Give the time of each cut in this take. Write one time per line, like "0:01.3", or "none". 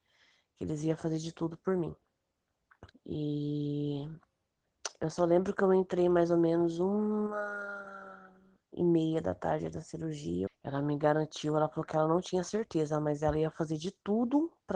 0:02.9
0:10.5